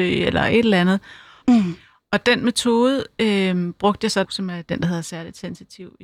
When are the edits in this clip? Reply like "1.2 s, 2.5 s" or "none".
1.4 s, 4.2 s